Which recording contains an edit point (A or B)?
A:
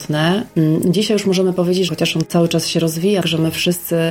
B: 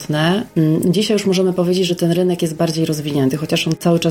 A